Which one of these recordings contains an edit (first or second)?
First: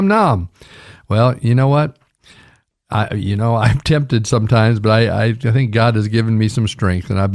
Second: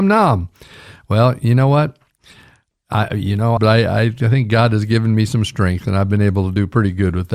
second